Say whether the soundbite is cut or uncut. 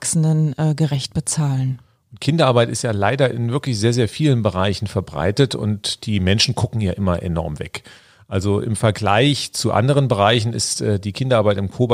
uncut